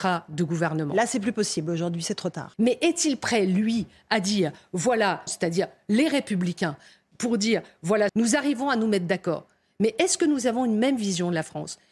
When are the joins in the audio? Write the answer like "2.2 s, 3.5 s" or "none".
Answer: 2.5 s, 5.3 s, 8.1 s